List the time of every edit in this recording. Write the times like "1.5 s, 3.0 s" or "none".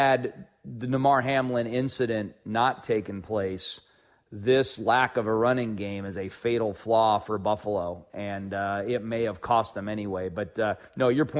none